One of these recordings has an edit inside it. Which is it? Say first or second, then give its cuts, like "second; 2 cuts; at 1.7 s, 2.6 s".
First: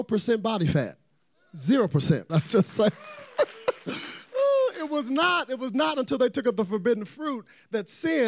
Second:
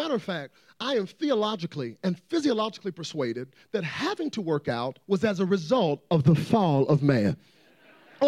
first; 1 cut; at 2.3 s